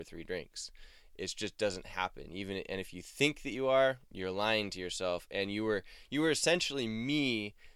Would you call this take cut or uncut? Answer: uncut